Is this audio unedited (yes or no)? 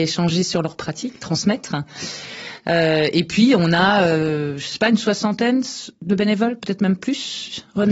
yes